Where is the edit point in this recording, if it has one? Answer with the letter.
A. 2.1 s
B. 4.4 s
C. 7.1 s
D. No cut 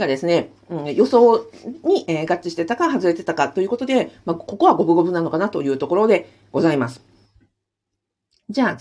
D